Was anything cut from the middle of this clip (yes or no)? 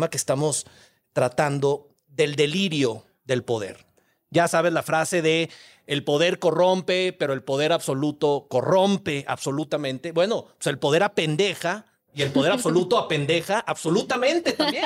no